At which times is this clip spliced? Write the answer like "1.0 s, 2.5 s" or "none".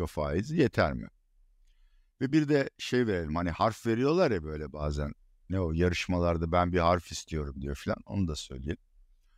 none

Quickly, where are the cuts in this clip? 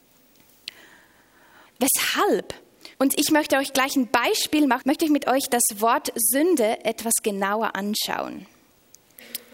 1.7 s, 2.9 s, 4.8 s

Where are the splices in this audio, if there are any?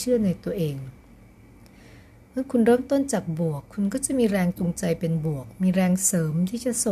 none

